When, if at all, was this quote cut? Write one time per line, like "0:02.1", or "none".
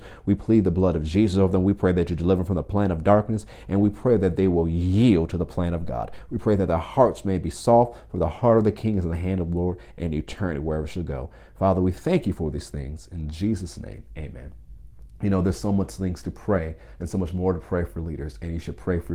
none